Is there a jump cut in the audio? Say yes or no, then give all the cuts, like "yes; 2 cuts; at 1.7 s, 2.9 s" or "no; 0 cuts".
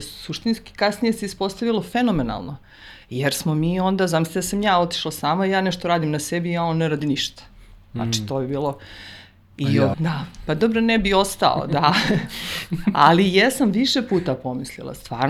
yes; 1 cut; at 9.9 s